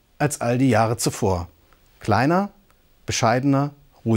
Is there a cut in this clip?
no; 0 cuts

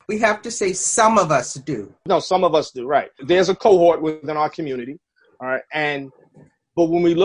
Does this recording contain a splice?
no; 0 cuts

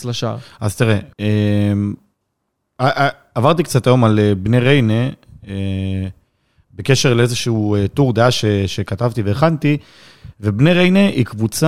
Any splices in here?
yes; 1 cut; at 1.1 s

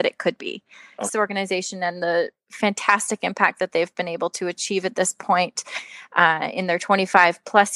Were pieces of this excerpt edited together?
yes; 1 cut; at 1.1 s

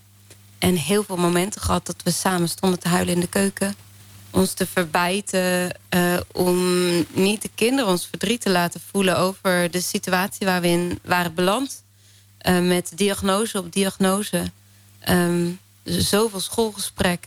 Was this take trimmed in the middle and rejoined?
no; 0 cuts

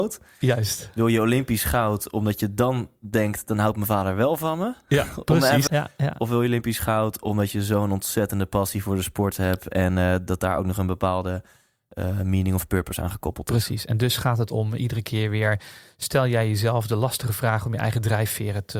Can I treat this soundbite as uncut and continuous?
no; 1 cut; at 5.7 s

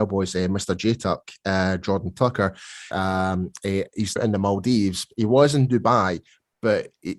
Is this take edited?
yes; 2 cuts; at 2.9 s, 4.2 s

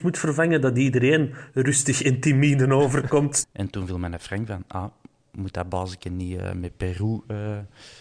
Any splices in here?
yes; 1 cut; at 3.4 s

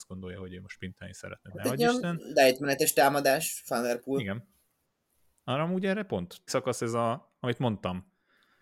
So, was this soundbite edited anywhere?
yes; 1 cut; at 6.5 s

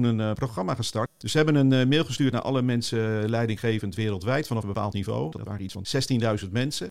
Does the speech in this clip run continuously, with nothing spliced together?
yes; 0 cuts

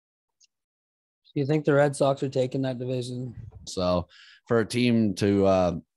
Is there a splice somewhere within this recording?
yes; 1 cut; at 3.7 s

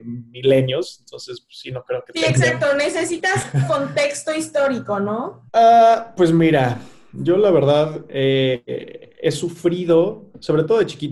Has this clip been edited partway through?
yes; 1 cut; at 5.5 s

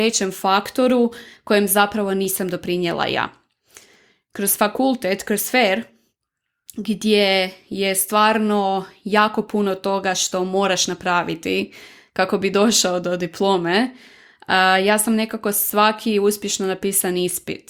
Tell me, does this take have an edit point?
no; 0 cuts

